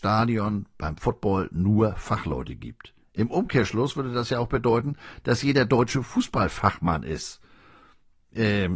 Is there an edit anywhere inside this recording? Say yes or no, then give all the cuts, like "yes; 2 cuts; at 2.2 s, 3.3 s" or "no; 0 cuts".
no; 0 cuts